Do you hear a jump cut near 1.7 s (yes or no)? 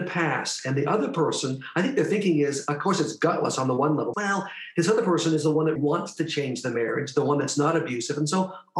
no